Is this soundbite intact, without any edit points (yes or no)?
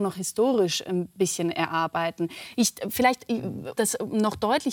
no